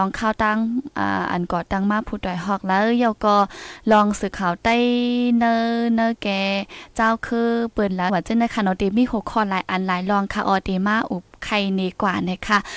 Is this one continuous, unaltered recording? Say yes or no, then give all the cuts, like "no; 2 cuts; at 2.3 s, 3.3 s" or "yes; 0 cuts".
no; 1 cut; at 8.1 s